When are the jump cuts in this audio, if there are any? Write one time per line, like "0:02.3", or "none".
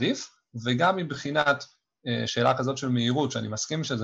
none